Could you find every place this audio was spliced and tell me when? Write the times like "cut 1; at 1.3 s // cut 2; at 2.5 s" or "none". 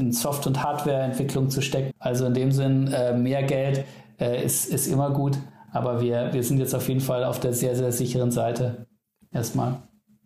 cut 1; at 1.9 s